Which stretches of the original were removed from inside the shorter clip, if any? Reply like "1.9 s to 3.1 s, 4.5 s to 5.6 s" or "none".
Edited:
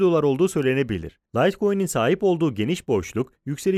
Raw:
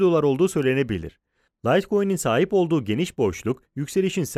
1.3 s to 1.6 s